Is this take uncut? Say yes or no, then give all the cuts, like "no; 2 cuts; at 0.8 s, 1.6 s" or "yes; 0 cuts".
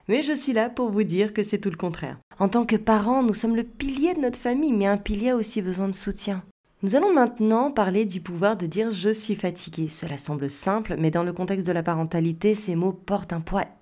no; 1 cut; at 2.3 s